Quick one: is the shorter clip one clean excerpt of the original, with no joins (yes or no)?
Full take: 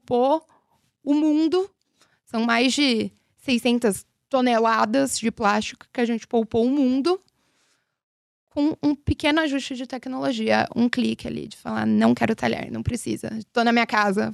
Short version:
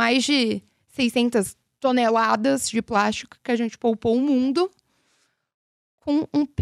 yes